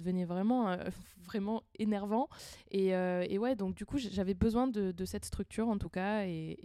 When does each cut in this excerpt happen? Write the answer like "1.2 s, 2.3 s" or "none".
none